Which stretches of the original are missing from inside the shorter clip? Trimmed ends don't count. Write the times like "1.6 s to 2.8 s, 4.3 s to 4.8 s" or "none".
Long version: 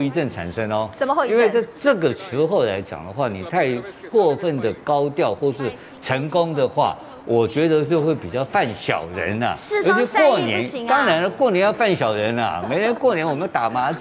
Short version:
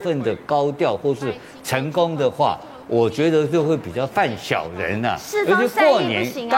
none